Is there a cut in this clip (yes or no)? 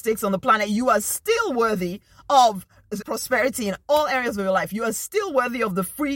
yes